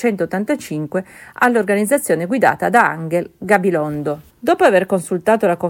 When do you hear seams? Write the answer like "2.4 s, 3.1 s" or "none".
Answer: 4.3 s